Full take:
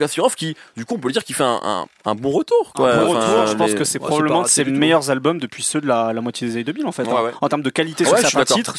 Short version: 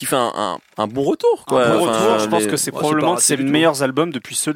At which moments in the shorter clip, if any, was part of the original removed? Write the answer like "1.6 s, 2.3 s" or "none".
none